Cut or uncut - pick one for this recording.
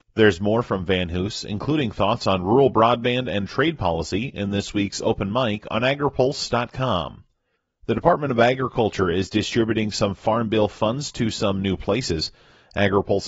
uncut